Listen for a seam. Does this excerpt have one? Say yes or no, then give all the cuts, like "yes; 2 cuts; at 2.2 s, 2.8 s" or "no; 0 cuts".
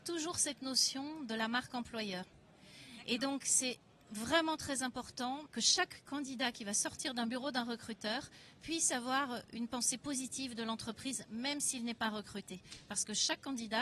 yes; 2 cuts; at 2.2 s, 5.5 s